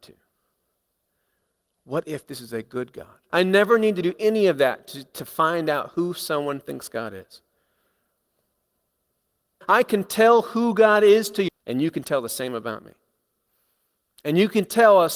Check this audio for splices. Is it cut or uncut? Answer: cut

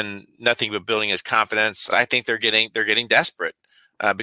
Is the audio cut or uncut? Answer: cut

